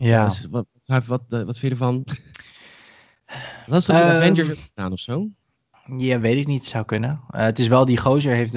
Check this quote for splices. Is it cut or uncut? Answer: uncut